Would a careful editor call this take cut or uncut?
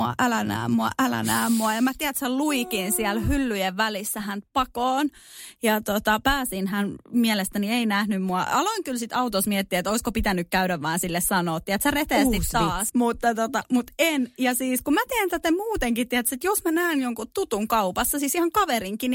cut